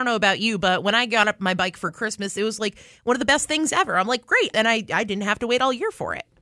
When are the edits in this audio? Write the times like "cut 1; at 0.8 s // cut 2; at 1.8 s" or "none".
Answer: cut 1; at 4.5 s